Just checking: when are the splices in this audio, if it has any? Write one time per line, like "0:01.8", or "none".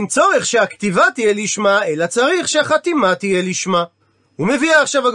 none